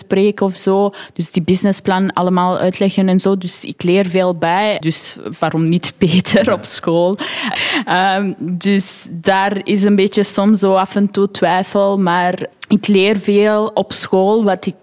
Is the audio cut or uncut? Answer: cut